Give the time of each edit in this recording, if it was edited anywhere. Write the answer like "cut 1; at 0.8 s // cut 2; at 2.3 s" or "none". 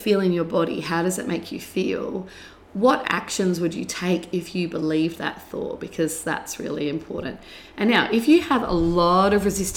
none